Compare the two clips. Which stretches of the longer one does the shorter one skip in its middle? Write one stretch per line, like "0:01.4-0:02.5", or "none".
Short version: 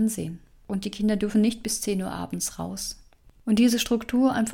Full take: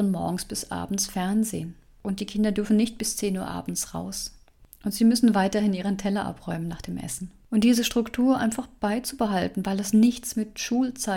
0:04.7-0:07.4

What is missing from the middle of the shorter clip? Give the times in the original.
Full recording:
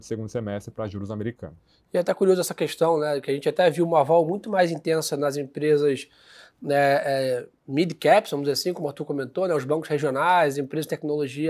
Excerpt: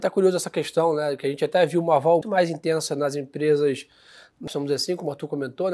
0:04.3-0:04.4
0:06.7-0:08.2

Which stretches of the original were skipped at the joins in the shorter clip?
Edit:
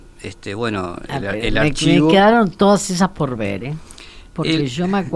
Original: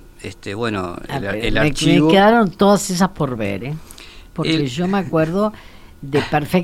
none

